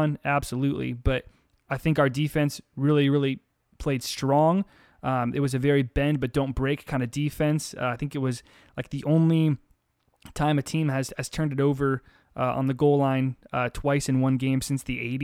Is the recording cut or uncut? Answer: uncut